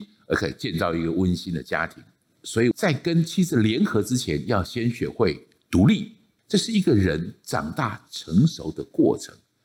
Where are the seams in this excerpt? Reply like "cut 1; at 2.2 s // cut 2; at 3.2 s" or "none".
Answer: cut 1; at 2.7 s // cut 2; at 6.4 s